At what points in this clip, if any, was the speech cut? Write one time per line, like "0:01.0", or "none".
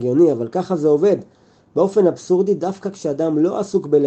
none